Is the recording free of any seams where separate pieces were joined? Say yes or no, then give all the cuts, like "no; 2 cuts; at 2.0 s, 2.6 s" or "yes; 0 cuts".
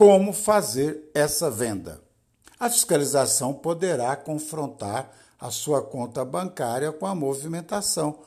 no; 1 cut; at 2.4 s